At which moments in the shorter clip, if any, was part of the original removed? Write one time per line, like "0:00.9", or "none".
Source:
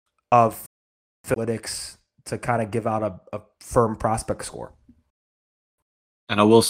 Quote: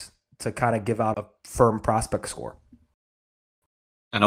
0:01.1